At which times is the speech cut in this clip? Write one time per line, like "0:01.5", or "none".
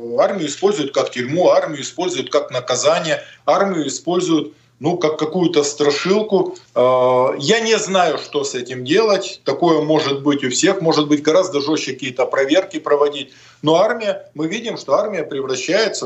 0:06.6